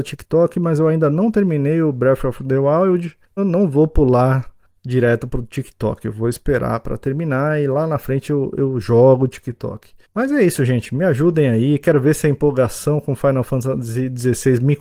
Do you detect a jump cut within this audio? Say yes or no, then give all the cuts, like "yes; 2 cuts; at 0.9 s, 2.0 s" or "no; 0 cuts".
yes; 1 cut; at 3.4 s